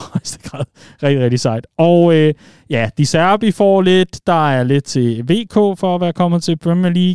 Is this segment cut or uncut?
uncut